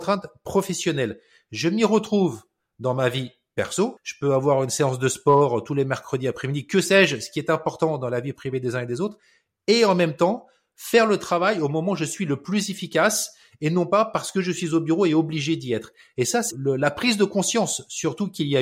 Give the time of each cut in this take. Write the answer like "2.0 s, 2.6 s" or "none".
4.0 s, 16.5 s